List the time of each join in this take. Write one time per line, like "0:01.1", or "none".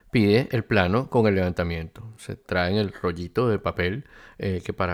none